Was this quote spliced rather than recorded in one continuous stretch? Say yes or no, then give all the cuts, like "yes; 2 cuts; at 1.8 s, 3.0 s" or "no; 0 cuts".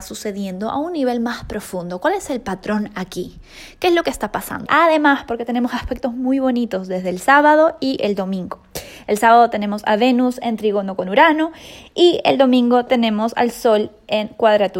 yes; 1 cut; at 4.7 s